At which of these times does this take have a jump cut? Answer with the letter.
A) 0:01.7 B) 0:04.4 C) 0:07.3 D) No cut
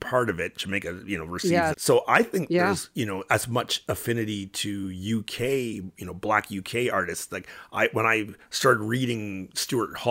A